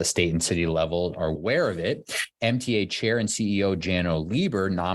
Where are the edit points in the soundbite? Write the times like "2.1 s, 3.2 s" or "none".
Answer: 1.4 s